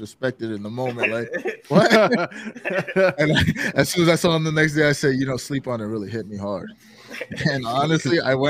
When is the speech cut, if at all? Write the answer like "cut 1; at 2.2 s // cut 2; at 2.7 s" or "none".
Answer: none